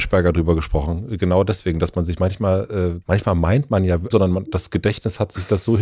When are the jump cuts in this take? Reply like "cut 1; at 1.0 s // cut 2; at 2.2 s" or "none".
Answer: cut 1; at 3.0 s // cut 2; at 4.1 s